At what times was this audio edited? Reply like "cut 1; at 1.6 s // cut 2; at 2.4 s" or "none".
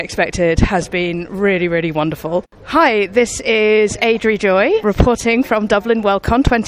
cut 1; at 2.4 s // cut 2; at 4.8 s